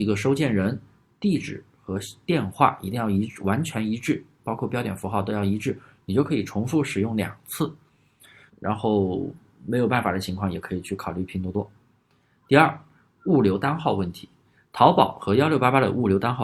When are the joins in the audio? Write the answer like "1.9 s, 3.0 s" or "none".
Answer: 8.5 s